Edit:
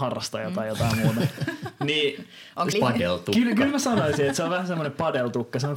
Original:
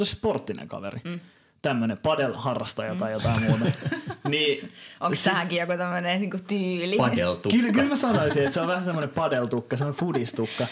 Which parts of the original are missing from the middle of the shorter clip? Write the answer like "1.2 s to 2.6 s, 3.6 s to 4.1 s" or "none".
5.2 s to 6.9 s